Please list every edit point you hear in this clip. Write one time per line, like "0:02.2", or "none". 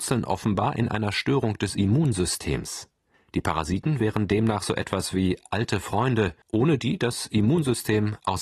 0:03.1
0:06.4